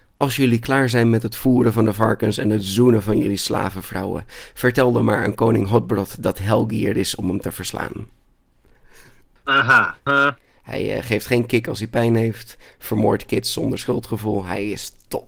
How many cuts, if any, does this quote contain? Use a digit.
1